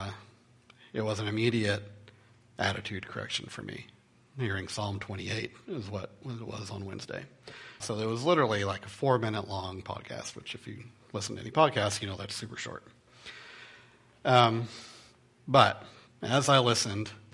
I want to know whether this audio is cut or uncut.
cut